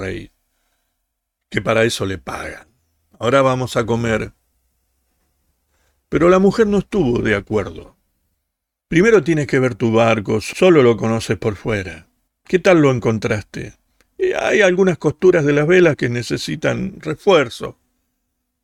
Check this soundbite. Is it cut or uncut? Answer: uncut